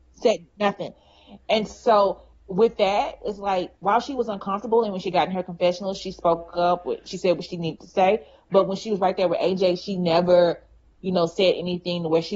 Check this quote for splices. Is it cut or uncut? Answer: uncut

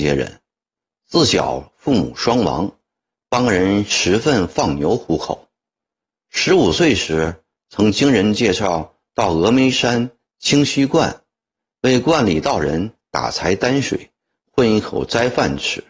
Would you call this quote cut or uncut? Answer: uncut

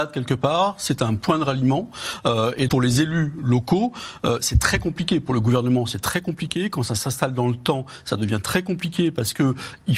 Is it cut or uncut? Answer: cut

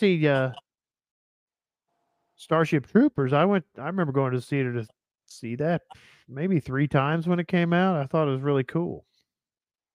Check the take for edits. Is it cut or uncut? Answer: uncut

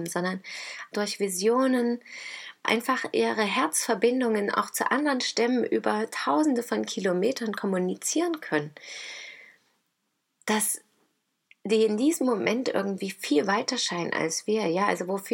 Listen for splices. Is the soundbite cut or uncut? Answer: cut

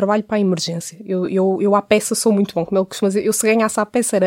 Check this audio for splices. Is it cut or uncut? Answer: uncut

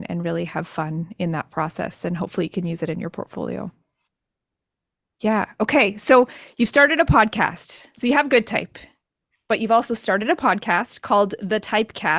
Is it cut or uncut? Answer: uncut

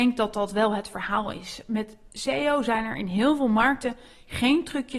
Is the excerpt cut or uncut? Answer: uncut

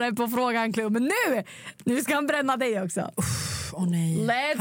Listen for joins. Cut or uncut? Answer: uncut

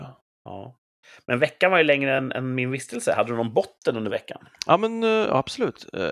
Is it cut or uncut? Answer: uncut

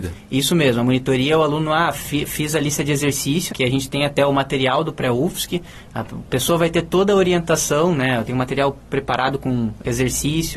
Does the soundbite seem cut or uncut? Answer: cut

